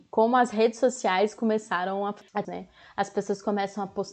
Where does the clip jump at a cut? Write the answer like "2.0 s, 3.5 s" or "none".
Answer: 2.4 s